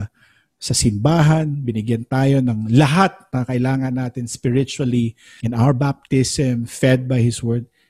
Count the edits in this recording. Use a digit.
1